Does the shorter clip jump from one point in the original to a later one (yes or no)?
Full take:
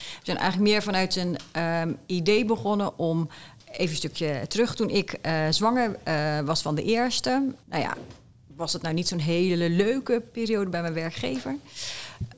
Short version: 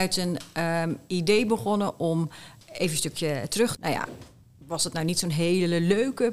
yes